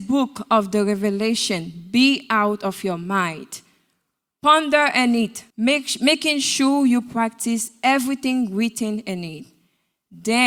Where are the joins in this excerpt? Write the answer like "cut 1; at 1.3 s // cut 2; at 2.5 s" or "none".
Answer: cut 1; at 5.5 s